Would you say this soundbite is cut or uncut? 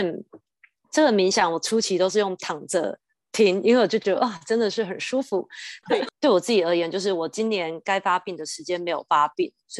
cut